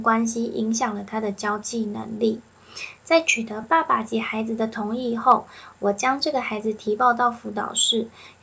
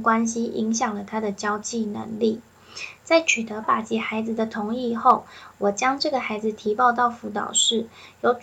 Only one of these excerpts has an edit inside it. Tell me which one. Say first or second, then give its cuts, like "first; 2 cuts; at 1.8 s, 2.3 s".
second; 1 cut; at 3.6 s